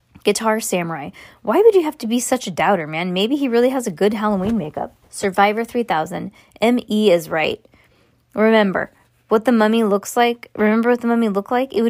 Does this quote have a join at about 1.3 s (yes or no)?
no